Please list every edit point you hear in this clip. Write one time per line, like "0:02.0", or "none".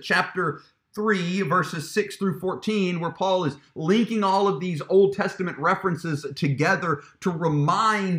none